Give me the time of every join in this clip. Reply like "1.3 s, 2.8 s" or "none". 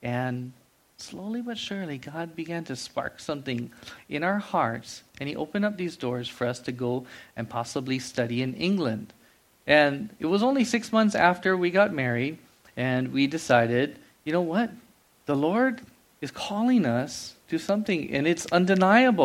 none